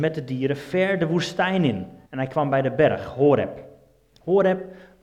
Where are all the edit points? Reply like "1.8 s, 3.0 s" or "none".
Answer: 2.0 s